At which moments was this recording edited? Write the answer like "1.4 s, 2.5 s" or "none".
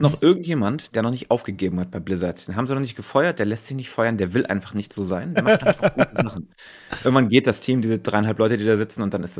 none